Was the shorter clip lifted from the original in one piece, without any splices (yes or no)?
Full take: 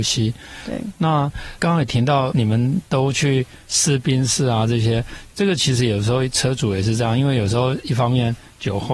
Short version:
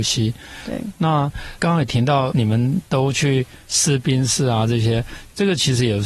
yes